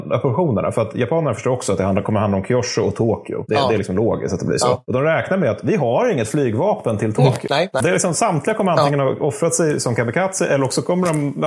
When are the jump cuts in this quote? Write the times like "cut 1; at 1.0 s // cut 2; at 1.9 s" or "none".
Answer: cut 1; at 7.8 s